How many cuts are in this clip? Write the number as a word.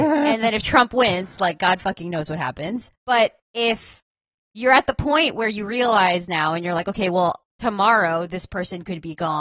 zero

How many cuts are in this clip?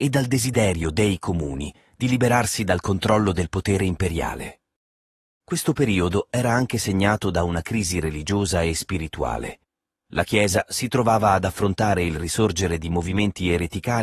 zero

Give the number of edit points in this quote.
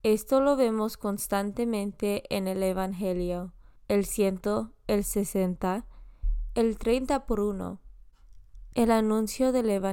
two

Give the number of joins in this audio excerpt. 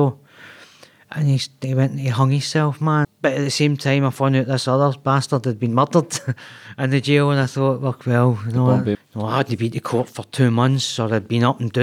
two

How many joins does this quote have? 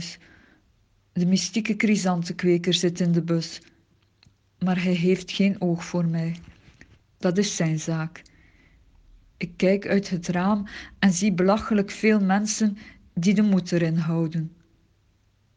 one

